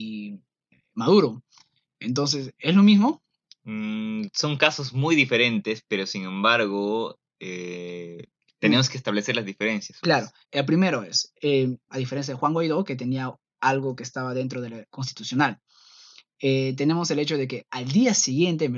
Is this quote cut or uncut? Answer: cut